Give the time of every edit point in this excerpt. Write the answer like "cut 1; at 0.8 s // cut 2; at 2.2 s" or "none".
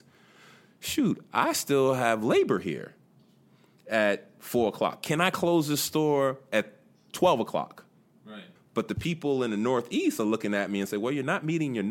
cut 1; at 8.6 s